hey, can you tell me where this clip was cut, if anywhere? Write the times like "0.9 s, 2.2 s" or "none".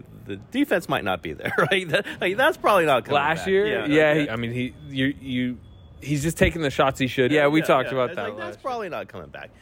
4.2 s, 7.3 s